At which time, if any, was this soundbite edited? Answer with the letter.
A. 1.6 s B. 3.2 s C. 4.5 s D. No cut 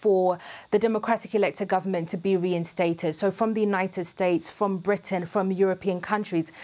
D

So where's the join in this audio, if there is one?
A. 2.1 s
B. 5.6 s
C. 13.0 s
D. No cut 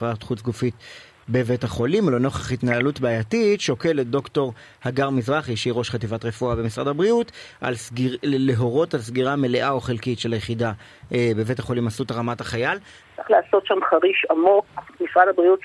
C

